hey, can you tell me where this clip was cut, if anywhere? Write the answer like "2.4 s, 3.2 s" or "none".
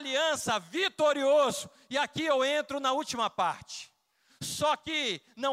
4.3 s

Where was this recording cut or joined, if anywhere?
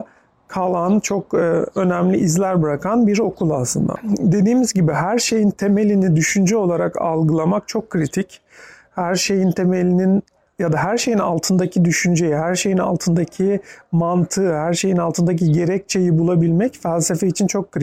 none

